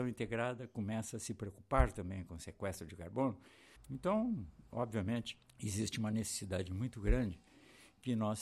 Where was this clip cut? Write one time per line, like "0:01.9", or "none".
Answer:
0:03.8
0:05.5